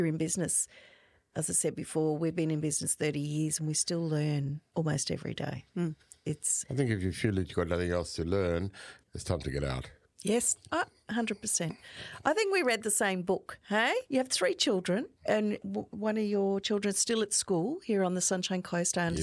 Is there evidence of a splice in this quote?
yes; 3 cuts; at 4.7 s, 14.0 s, 15.2 s

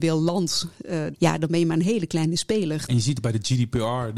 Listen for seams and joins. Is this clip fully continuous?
no; 2 cuts; at 1.1 s, 2.9 s

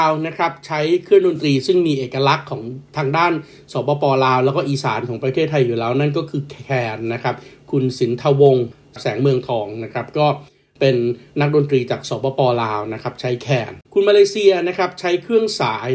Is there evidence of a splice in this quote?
yes; 1 cut; at 13.8 s

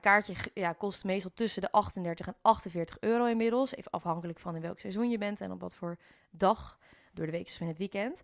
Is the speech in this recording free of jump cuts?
yes; 0 cuts

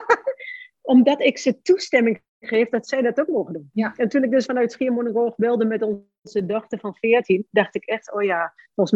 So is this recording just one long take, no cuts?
yes; 0 cuts

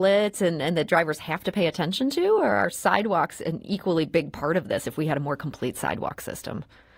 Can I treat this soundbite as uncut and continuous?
yes; 0 cuts

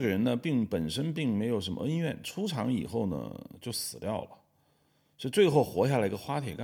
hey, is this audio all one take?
yes; 0 cuts

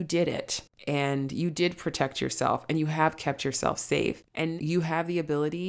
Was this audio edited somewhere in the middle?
yes; 1 cut; at 4.6 s

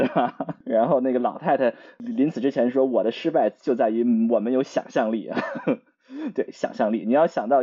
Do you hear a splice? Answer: no; 0 cuts

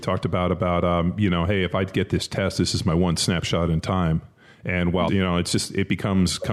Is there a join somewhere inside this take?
yes; 1 cut; at 5.1 s

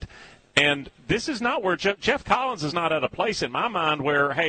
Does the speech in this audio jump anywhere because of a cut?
no; 0 cuts

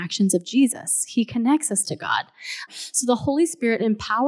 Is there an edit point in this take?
yes; 1 cut; at 2.7 s

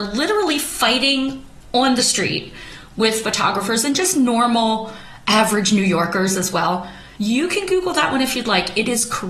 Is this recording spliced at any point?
yes; 1 cut; at 7.2 s

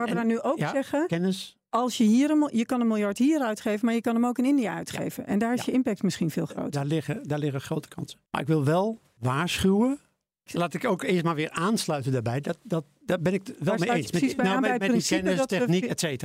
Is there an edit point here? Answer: yes; 2 cuts; at 8.3 s, 10.5 s

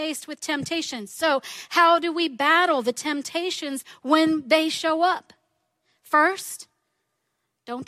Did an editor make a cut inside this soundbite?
no; 0 cuts

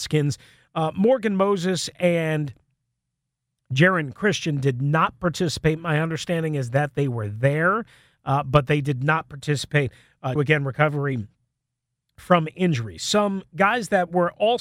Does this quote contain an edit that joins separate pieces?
yes; 1 cut; at 10.4 s

